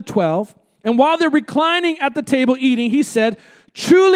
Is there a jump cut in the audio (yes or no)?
no